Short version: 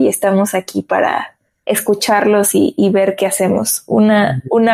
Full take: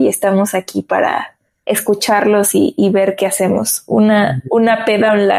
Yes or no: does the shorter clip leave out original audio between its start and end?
no